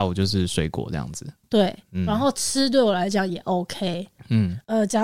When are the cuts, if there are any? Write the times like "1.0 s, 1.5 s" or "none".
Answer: 1.4 s